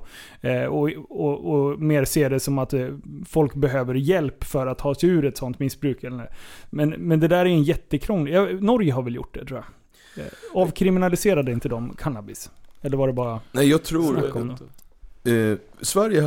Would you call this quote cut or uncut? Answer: uncut